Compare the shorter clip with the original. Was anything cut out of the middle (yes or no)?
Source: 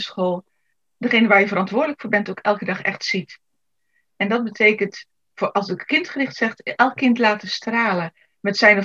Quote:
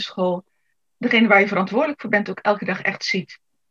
no